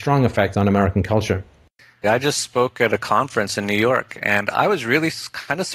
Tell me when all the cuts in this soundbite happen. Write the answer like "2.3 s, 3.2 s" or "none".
2.0 s